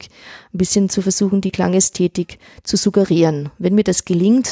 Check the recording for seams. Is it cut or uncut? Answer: uncut